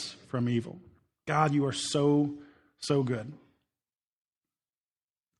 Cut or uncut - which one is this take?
uncut